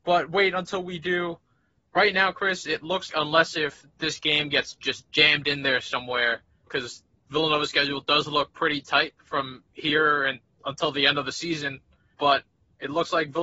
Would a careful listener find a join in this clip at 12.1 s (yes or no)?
no